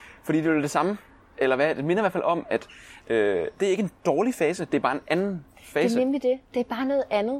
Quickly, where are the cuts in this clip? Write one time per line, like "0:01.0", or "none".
0:01.3
0:03.0